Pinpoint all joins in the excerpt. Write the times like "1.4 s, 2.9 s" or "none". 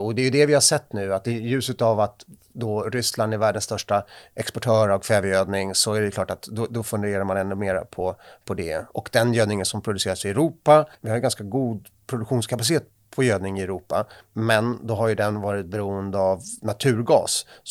10.9 s